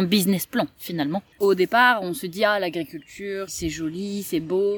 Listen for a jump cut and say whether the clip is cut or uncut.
cut